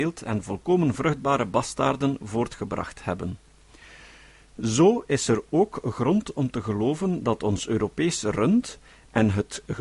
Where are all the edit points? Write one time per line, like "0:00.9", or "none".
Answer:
none

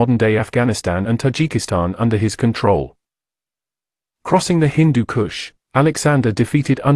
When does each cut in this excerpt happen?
none

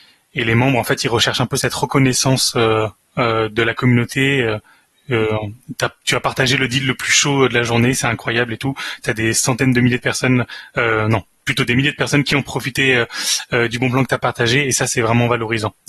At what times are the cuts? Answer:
none

